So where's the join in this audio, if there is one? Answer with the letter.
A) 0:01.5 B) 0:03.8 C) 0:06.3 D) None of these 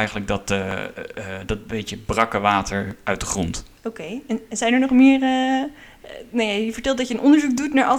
B